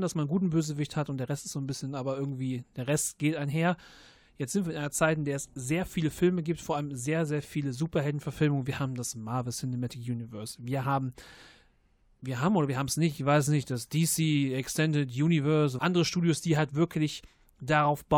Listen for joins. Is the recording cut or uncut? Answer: cut